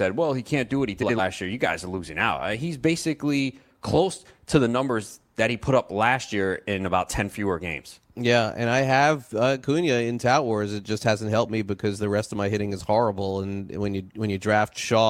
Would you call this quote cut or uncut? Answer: uncut